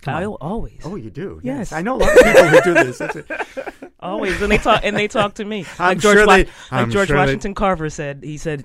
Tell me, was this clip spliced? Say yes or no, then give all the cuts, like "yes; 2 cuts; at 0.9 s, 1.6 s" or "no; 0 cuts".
no; 0 cuts